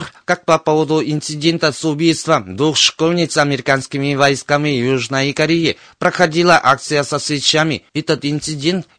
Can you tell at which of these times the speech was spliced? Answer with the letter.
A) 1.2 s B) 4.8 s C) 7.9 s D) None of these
C